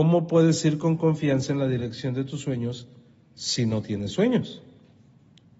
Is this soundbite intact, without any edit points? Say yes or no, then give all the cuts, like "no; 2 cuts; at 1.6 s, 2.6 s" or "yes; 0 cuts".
yes; 0 cuts